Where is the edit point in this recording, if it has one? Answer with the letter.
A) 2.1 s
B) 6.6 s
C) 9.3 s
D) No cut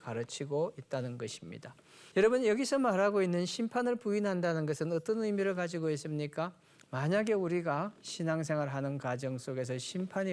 A